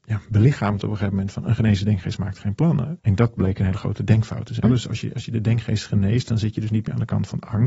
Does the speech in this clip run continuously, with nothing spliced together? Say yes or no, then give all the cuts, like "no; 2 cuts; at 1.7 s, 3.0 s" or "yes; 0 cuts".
no; 2 cuts; at 3.0 s, 4.6 s